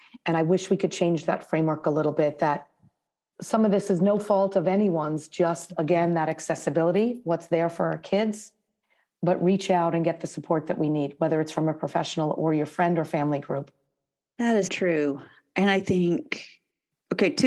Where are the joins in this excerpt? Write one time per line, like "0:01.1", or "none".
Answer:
0:14.7

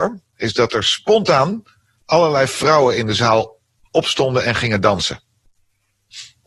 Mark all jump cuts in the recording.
none

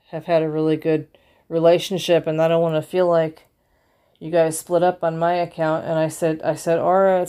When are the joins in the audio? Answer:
none

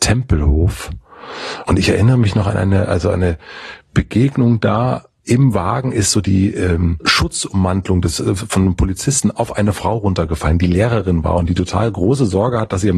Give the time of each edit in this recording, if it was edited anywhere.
none

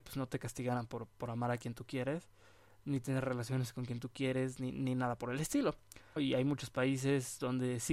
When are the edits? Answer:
0:06.2

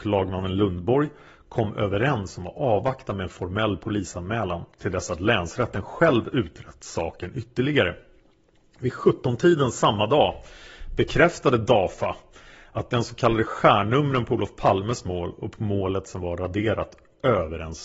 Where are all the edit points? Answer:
none

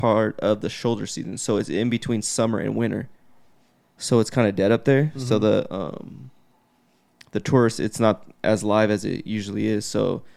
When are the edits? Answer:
none

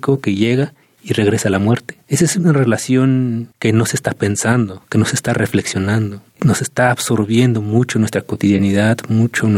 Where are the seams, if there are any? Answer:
none

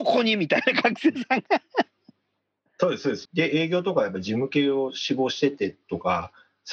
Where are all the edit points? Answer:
0:03.3

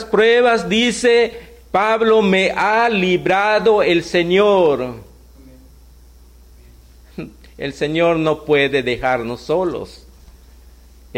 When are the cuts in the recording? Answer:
none

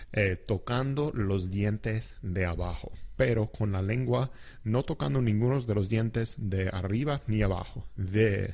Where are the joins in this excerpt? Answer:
0:03.2

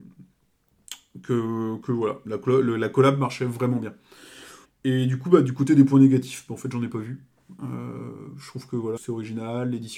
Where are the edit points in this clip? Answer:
0:04.6
0:09.0

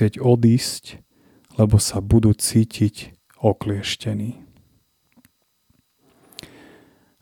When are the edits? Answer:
none

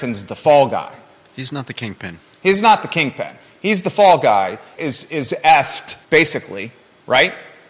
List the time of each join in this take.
0:04.7
0:06.0

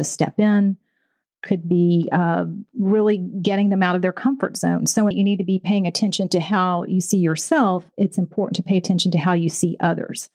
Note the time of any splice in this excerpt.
0:05.1

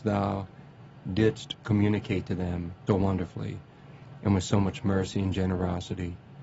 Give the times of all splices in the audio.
0:02.9

